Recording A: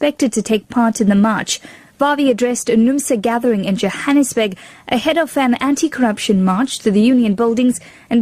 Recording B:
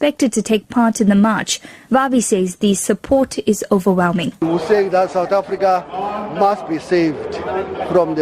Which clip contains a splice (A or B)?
A